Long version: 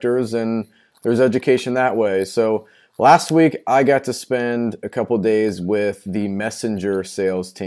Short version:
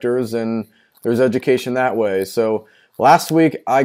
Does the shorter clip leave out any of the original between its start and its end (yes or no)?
no